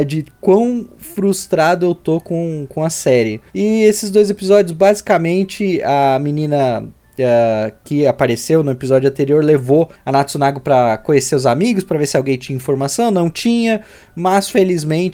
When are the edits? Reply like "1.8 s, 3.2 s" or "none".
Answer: 3.5 s

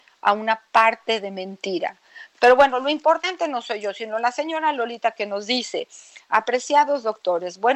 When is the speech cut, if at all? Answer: 2.3 s

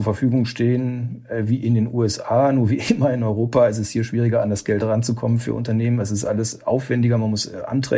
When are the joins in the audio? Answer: none

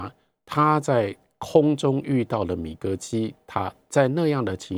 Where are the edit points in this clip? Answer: none

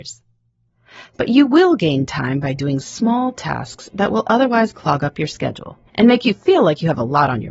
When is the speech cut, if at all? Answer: 1.1 s, 5.9 s

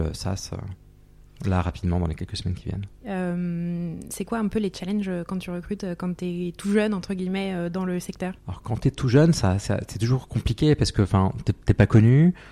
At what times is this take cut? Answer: 3.0 s, 8.4 s

